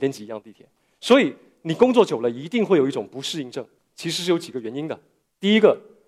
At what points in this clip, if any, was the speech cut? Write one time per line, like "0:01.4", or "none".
0:03.8